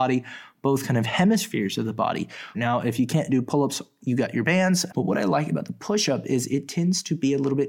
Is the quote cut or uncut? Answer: cut